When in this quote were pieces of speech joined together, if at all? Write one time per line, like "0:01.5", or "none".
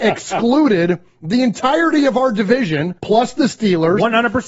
0:03.0